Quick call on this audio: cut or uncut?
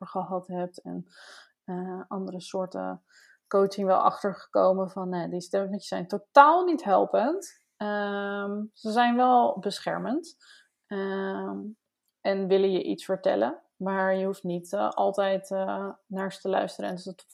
uncut